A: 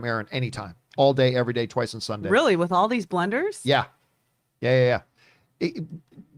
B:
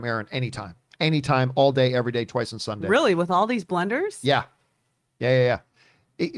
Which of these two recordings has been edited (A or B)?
A